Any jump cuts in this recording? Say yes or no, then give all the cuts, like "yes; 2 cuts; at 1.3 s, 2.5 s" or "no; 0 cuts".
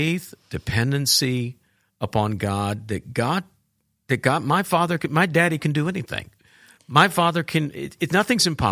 no; 0 cuts